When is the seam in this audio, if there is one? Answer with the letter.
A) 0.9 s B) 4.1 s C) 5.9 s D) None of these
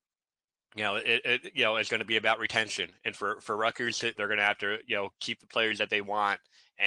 B